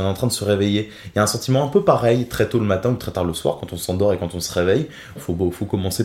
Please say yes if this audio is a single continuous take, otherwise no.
no